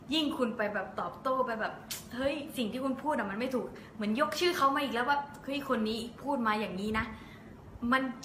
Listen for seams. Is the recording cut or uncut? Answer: uncut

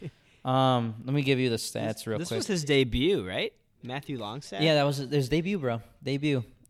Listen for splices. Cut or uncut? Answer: uncut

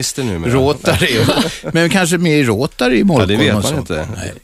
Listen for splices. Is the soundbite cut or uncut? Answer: uncut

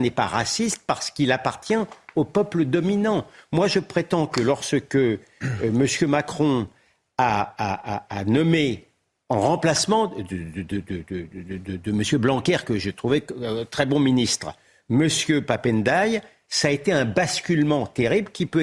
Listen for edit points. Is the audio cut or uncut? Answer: uncut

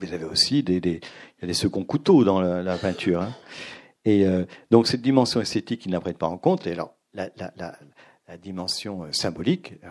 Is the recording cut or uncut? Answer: uncut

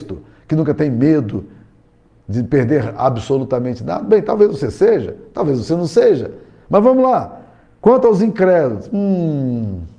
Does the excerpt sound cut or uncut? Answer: uncut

